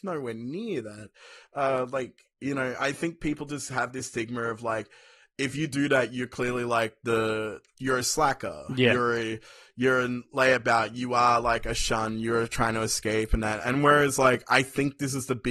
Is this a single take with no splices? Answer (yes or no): yes